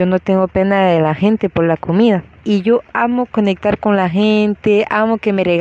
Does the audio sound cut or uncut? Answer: cut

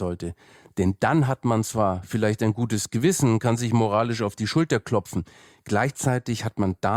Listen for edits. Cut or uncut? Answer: uncut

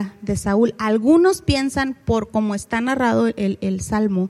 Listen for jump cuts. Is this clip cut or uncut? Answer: uncut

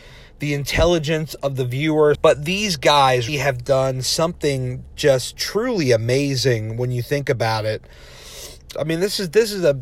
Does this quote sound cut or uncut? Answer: cut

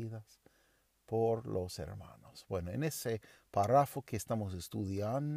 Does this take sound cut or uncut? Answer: uncut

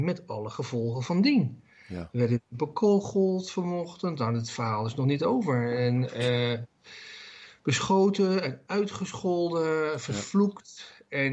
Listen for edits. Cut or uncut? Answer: uncut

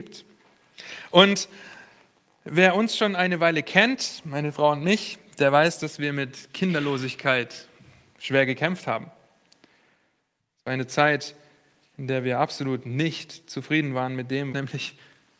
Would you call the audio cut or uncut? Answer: cut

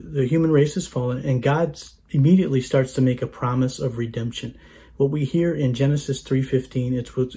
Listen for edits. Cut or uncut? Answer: uncut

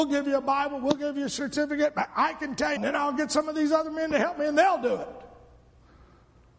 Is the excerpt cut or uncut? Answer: cut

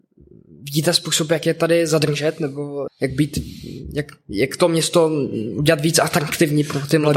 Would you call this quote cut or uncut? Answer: cut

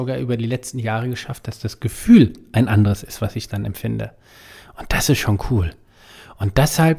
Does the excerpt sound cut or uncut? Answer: uncut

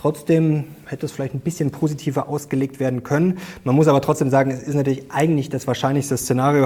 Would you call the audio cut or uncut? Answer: uncut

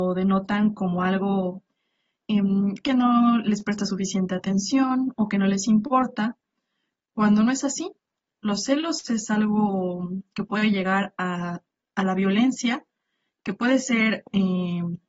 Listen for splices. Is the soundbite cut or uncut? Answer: uncut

